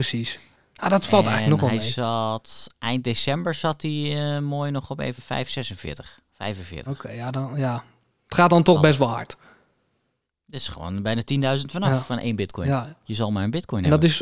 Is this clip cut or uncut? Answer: uncut